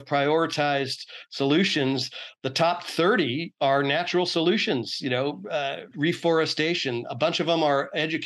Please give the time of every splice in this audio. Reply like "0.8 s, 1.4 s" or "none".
5.9 s